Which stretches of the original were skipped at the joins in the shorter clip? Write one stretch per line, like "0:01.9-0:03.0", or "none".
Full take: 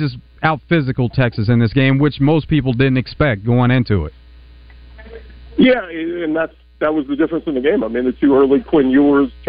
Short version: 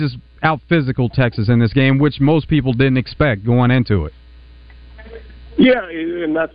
none